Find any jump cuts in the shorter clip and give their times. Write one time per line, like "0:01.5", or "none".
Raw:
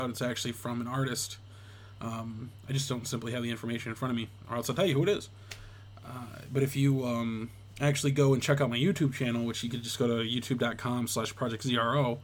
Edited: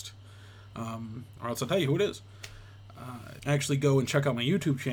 0:01.4
0:03.4